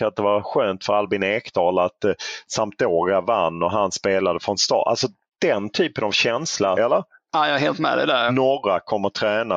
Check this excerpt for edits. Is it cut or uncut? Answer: cut